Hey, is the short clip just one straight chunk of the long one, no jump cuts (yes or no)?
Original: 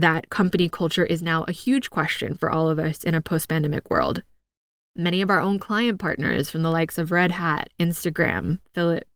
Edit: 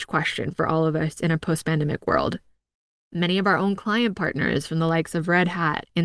yes